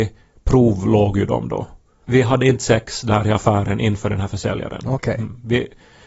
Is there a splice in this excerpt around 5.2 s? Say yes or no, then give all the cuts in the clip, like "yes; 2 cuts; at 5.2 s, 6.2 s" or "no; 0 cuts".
no; 1 cut; at 2.0 s